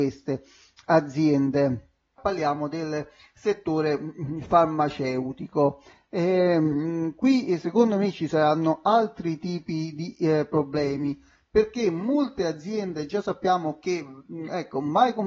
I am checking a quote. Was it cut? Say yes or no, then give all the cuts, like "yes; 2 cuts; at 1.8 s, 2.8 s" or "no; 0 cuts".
yes; 1 cut; at 2.2 s